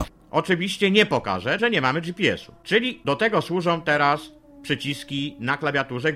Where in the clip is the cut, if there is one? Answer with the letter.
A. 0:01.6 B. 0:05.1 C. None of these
A